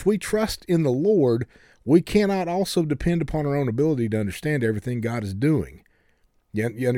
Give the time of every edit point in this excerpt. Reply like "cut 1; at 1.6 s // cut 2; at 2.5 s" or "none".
none